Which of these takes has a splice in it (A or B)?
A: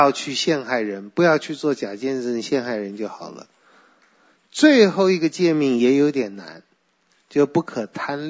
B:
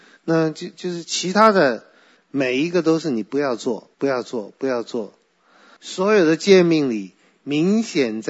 B